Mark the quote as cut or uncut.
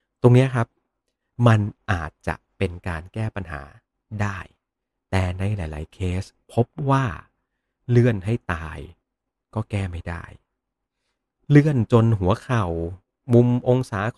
uncut